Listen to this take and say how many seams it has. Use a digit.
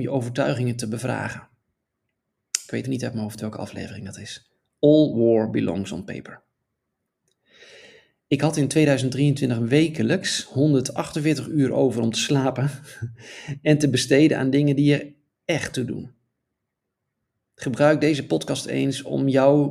1